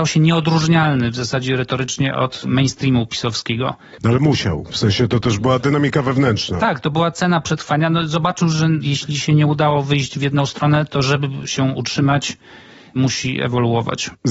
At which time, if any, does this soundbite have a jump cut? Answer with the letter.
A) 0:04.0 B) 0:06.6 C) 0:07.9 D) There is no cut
D